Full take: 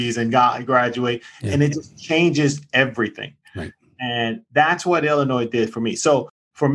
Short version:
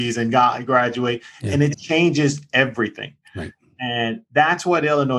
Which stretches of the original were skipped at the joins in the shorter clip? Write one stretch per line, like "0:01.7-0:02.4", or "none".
0:01.7-0:01.9